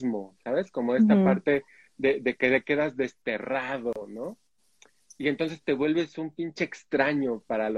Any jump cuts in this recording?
no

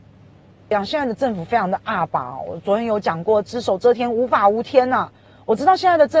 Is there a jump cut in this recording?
yes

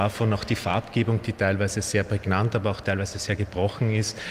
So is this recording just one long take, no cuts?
yes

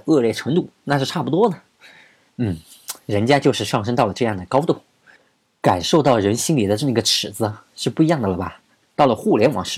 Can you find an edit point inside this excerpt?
yes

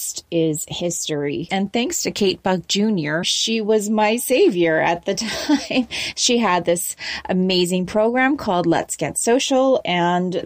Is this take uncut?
no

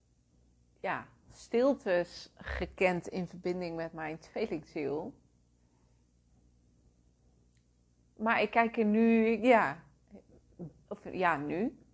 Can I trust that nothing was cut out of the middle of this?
yes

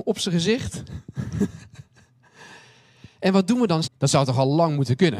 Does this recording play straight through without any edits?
no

